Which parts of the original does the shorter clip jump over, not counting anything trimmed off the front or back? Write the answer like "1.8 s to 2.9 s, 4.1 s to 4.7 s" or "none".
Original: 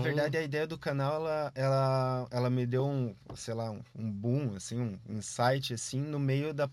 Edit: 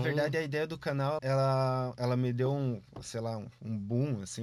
1.2 s to 1.5 s

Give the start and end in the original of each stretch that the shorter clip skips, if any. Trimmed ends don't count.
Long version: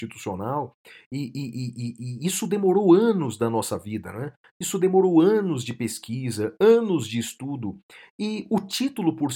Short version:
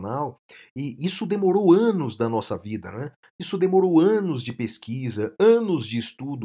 1.3 s to 2.2 s

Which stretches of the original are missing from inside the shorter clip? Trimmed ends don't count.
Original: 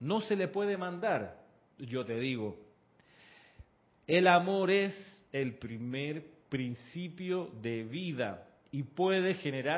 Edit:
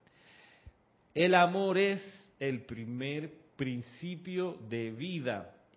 none

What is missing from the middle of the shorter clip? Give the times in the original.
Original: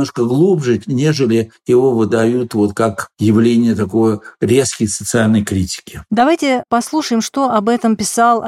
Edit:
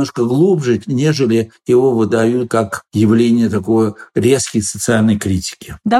2.5 s to 2.7 s

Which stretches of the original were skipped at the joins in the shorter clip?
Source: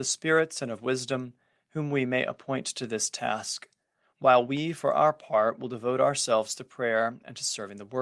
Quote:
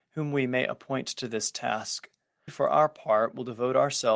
4.1 s to 4.7 s

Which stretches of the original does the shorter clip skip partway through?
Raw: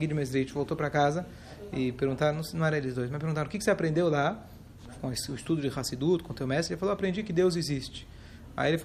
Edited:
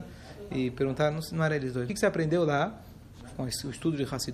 3.1 s to 3.5 s

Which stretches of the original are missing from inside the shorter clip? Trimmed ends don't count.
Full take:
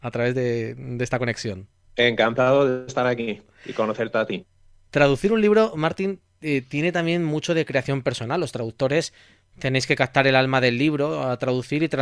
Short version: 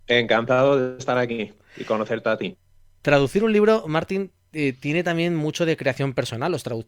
none

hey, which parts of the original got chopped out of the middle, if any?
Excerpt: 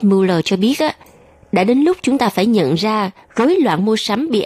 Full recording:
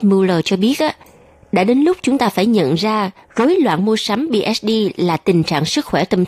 none

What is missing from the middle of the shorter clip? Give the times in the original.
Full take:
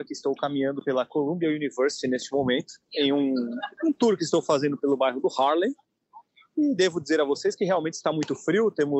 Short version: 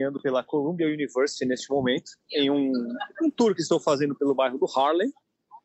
none

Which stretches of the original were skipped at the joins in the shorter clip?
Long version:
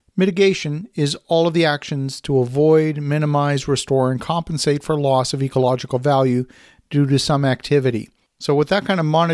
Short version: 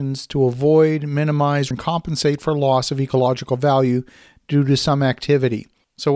3.6 s to 4.1 s

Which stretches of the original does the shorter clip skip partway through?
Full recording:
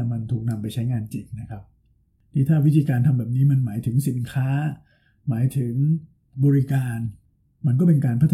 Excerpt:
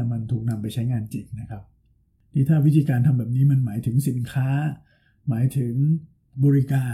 none

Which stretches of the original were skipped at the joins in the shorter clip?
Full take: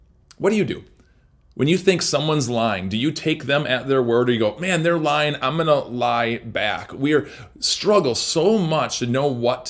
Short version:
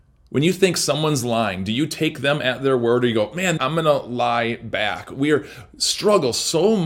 4.8 s to 5.4 s

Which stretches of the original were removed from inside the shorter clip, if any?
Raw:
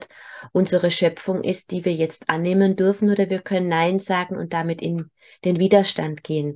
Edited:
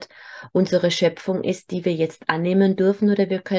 none

